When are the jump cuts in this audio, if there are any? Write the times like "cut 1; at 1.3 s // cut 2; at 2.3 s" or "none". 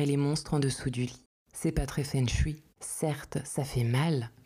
cut 1; at 2.8 s